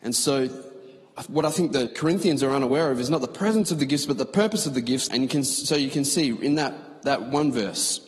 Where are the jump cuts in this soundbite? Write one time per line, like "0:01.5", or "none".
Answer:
0:01.9
0:05.1